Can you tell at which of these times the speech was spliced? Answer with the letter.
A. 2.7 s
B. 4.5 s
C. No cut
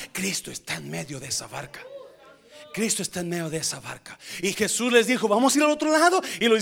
B